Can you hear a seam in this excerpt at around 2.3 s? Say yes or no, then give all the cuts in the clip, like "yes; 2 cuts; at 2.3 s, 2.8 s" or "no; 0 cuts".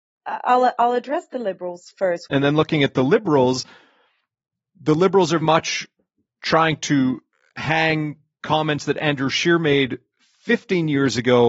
yes; 2 cuts; at 2.3 s, 5.4 s